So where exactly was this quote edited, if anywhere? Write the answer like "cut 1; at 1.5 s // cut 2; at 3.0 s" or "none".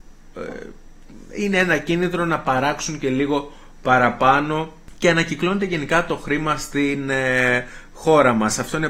none